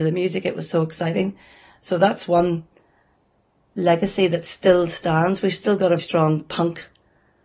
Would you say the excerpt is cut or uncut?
cut